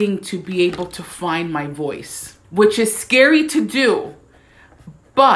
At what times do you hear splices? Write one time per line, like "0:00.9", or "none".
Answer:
0:02.4